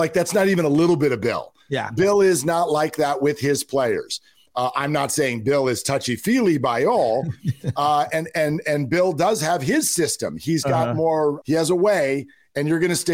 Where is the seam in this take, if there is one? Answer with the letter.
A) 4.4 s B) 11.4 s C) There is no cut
B